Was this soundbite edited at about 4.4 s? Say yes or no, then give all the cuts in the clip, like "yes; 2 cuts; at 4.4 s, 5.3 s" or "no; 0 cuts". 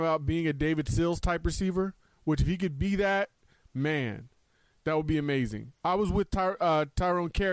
no; 0 cuts